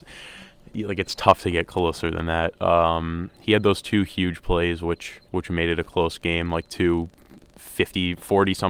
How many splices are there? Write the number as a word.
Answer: two